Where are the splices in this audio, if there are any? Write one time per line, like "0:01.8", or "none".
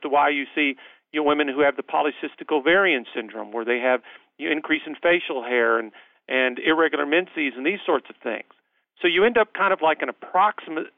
none